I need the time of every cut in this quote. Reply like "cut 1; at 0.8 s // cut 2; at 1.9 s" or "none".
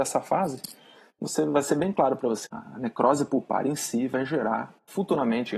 cut 1; at 2.5 s